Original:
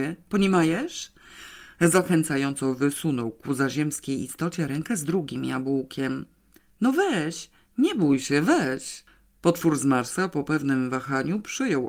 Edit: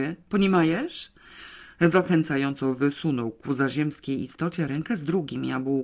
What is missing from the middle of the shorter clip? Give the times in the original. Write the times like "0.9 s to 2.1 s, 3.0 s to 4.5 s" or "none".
none